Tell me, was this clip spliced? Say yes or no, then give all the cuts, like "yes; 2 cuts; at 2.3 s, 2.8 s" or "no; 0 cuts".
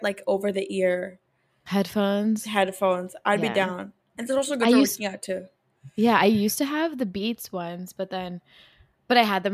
no; 0 cuts